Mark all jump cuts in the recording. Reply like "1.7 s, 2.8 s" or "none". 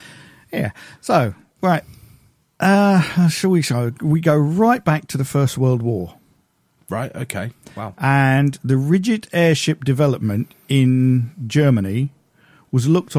none